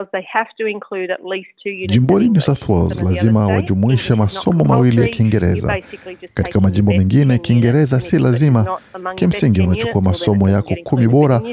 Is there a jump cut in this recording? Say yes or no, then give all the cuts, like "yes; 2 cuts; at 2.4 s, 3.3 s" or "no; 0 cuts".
no; 0 cuts